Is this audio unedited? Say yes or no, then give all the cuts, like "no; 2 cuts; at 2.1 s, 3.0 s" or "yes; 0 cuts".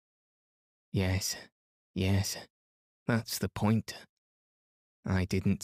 yes; 0 cuts